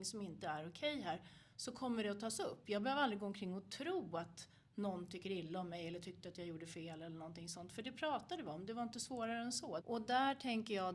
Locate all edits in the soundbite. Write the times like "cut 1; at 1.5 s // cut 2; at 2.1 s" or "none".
cut 1; at 9.8 s